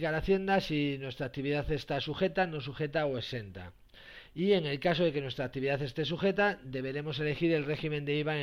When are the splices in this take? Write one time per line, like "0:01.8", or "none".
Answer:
none